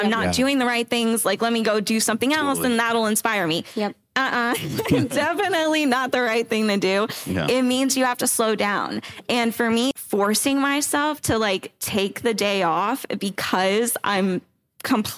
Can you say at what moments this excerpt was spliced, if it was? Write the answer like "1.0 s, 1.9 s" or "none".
9.9 s